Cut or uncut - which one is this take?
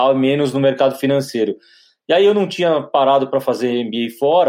uncut